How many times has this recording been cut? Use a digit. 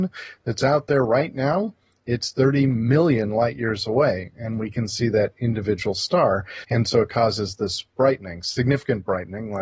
1